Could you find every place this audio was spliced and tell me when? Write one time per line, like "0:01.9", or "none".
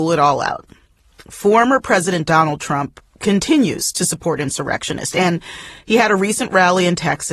none